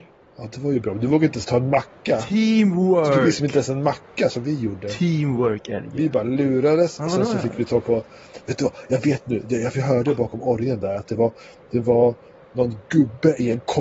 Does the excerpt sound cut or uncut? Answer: uncut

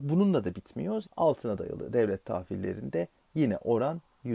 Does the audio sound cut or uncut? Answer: cut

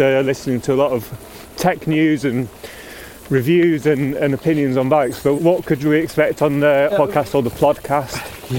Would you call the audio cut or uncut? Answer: cut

